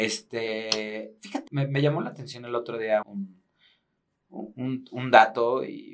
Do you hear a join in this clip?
yes; 2 cuts; at 1.5 s, 3.0 s

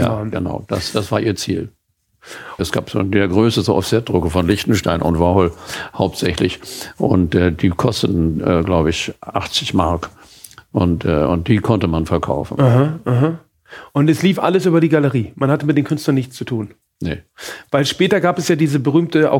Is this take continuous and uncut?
no; 1 cut; at 2.6 s

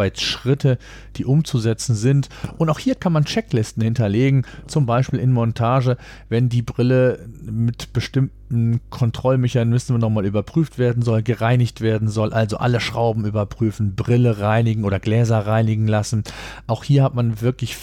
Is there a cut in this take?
no; 0 cuts

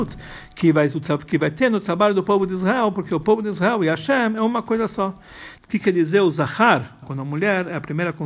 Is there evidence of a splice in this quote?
yes; 2 cuts; at 5.6 s, 7.0 s

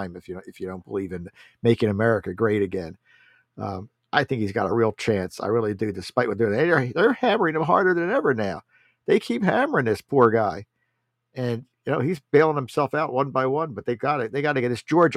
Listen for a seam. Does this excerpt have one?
no; 0 cuts

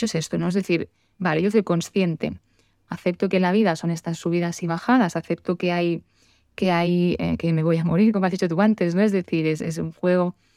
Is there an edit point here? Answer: yes; 1 cut; at 2.8 s

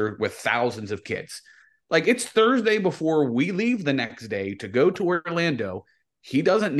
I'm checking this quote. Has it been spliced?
no; 0 cuts

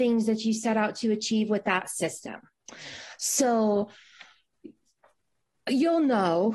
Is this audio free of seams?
yes; 0 cuts

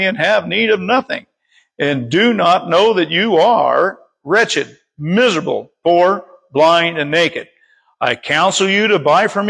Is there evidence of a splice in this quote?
no; 0 cuts

